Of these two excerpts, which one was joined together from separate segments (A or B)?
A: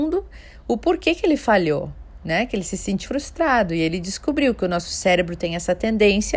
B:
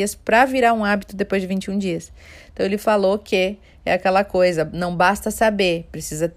A